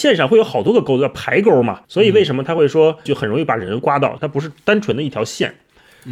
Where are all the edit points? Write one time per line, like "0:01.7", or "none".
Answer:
0:01.8
0:03.1
0:04.2